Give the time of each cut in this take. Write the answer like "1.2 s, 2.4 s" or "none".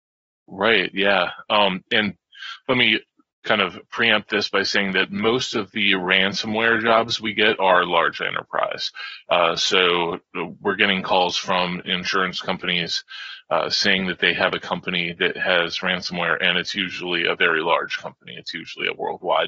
none